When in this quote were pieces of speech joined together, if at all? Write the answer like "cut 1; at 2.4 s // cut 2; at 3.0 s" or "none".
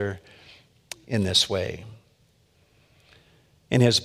none